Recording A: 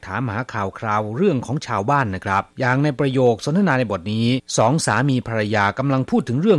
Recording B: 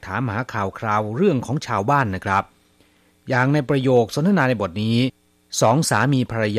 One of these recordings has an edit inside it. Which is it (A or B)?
A